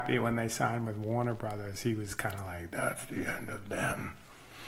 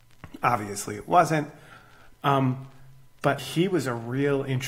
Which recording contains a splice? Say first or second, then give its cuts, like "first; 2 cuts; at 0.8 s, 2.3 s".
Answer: second; 2 cuts; at 2.1 s, 3.4 s